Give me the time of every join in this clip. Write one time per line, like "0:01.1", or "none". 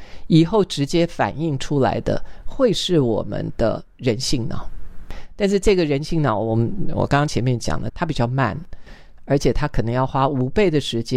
0:07.9
0:09.2